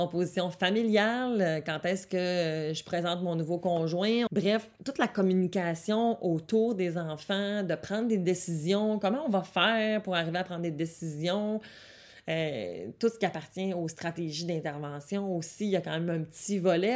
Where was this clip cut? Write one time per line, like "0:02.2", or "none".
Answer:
0:04.3

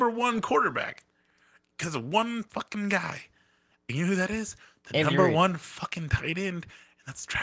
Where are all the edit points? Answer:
none

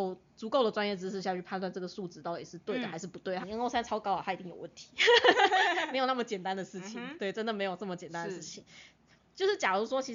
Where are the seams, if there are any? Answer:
0:03.4

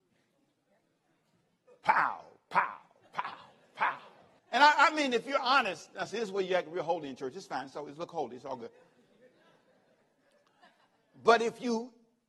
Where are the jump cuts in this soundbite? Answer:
0:04.4

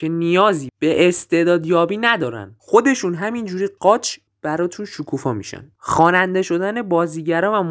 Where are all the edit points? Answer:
0:03.8

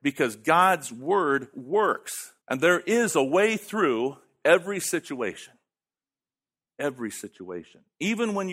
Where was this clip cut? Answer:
0:02.4

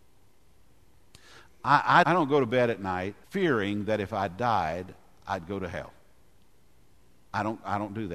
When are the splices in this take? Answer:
0:02.0
0:03.2

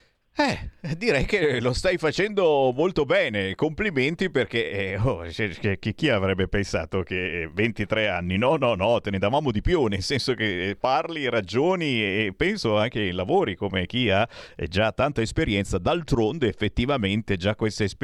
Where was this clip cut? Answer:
none

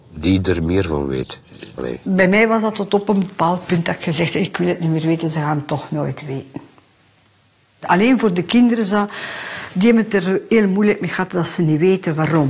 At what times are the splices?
0:01.8

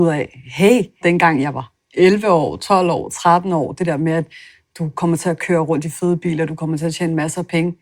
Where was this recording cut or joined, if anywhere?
0:01.0

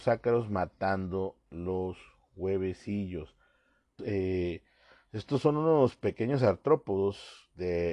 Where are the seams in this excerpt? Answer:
0:04.0

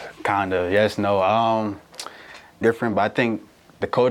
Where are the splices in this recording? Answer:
0:02.6

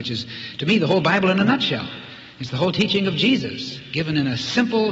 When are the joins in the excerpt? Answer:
none

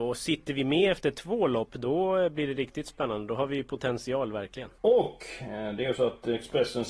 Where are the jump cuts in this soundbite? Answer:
0:04.8

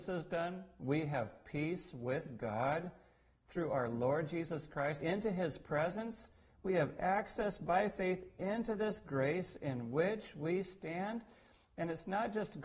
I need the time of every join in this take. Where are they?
0:05.0

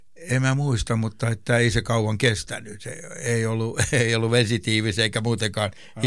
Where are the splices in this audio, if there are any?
none

